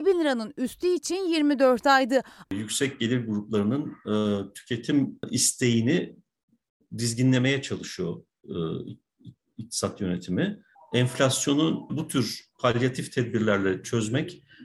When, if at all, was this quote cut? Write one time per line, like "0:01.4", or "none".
0:02.4
0:11.9